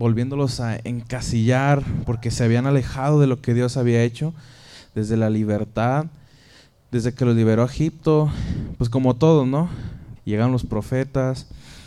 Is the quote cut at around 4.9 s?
no; 1 cut; at 10.2 s

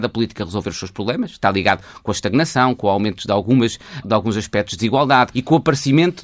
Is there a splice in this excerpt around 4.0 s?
yes; 2 cuts; at 4.0 s, 5.3 s

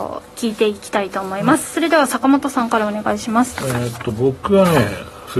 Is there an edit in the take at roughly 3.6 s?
no; 0 cuts

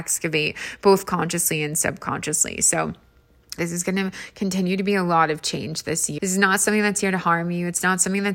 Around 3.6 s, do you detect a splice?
yes; 2 cuts; at 3.6 s, 6.2 s

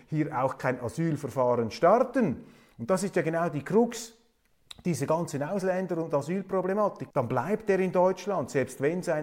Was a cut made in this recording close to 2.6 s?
no; 1 cut; at 7.1 s

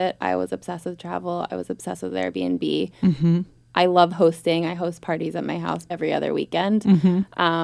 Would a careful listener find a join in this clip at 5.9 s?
yes; 1 cut; at 5.9 s

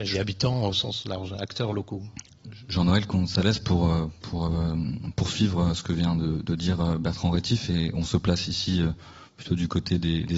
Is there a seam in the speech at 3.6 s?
no; 0 cuts

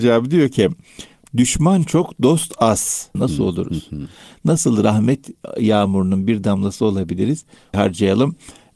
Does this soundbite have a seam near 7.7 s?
yes; 2 cuts; at 3.1 s, 7.7 s

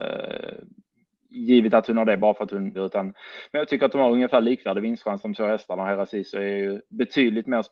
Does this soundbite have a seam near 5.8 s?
no; 1 cut; at 2.7 s

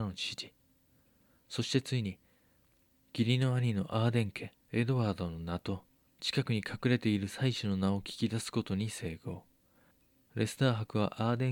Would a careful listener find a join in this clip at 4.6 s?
yes; 1 cut; at 4.6 s

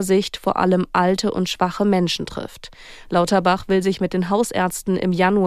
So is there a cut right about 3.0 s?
yes; 1 cut; at 3.0 s

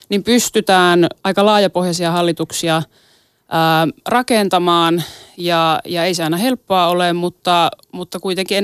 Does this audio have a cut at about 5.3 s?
no; 0 cuts

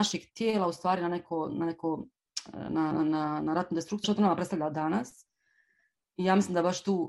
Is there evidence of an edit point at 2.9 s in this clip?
yes; 2 cuts; at 2.9 s, 4.0 s

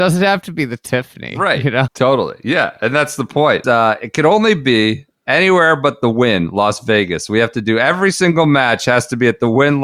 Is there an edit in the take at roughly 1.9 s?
yes; 2 cuts; at 1.9 s, 3.6 s

